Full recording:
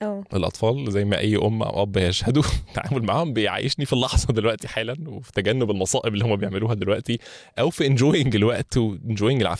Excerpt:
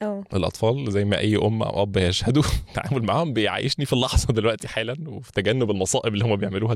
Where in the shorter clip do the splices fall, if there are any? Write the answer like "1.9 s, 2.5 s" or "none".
none